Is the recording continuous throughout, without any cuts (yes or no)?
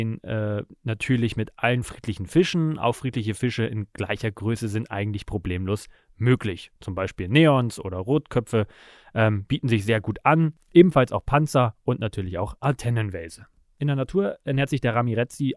yes